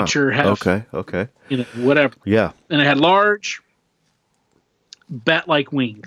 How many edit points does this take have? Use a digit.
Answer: 0